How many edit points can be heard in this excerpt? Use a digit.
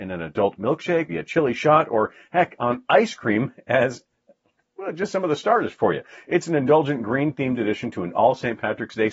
1